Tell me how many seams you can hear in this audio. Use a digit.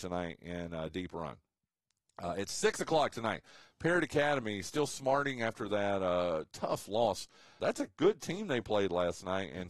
1